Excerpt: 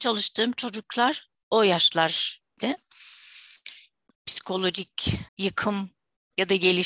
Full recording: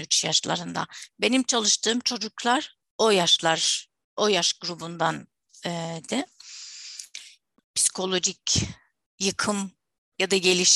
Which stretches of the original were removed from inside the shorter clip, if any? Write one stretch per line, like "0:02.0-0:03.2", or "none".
0:04.1-0:06.1
0:08.8-0:09.1